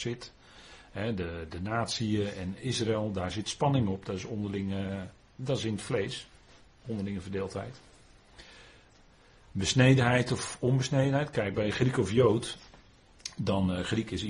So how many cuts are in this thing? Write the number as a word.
one